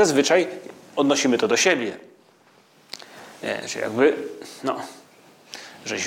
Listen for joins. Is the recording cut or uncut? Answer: uncut